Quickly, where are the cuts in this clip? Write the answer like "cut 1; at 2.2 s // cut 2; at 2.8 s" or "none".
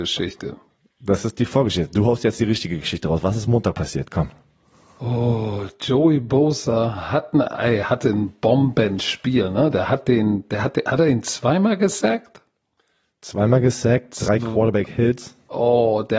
none